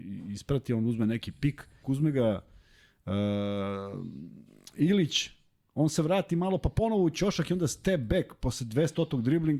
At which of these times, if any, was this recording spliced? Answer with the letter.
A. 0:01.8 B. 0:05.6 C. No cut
A